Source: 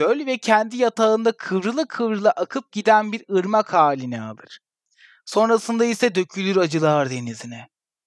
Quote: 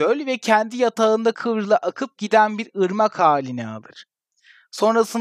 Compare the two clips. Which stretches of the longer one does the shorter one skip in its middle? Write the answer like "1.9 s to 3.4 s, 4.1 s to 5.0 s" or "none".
1.3 s to 1.9 s